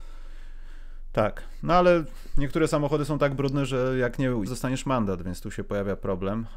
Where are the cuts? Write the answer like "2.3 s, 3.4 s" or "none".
4.4 s